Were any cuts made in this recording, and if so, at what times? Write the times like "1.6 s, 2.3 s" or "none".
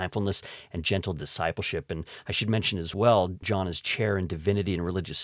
none